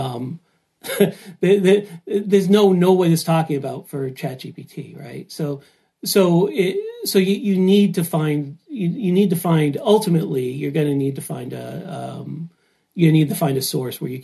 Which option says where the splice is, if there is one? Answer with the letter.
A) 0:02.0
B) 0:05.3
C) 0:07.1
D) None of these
D